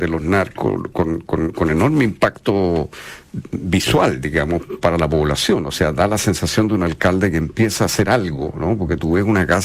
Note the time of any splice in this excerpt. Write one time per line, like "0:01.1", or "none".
none